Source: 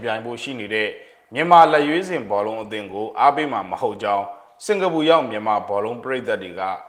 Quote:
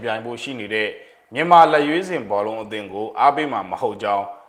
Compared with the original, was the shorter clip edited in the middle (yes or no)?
no